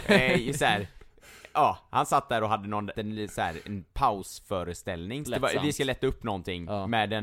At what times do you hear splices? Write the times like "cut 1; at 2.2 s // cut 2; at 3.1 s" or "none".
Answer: cut 1; at 2.9 s // cut 2; at 5.2 s